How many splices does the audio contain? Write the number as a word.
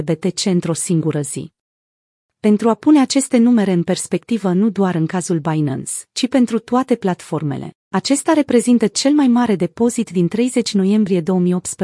zero